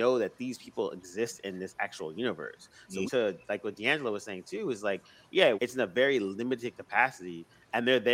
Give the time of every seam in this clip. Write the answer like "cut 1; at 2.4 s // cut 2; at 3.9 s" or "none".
cut 1; at 3.1 s // cut 2; at 5.6 s